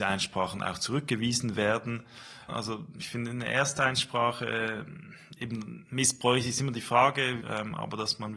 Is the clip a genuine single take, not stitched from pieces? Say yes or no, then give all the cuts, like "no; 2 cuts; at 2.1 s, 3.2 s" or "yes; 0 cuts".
no; 2 cuts; at 2.5 s, 7.4 s